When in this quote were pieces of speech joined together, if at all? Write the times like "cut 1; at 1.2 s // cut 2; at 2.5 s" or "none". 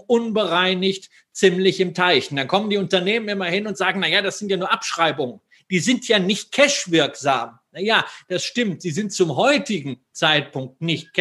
none